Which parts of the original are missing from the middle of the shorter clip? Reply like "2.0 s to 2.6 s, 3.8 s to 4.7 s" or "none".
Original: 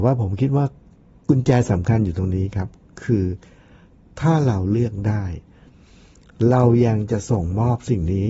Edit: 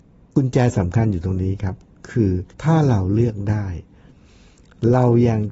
3.5 s to 4.1 s